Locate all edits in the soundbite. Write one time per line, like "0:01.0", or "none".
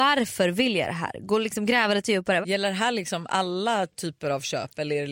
0:02.4